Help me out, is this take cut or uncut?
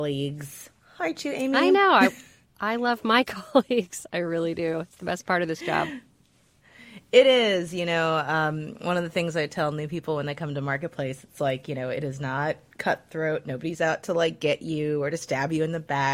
uncut